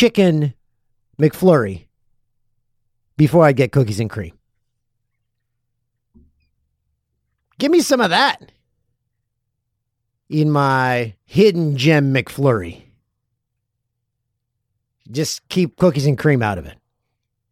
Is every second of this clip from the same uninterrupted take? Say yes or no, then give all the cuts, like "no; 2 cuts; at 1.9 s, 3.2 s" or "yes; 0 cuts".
yes; 0 cuts